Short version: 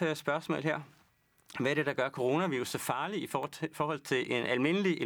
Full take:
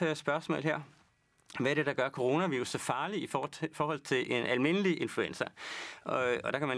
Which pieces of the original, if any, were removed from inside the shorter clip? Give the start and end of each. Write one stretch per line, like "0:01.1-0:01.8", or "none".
none